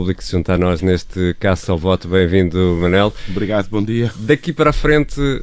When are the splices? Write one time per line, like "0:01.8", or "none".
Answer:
none